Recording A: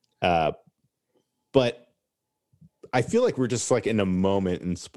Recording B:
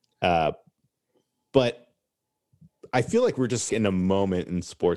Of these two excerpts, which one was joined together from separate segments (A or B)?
B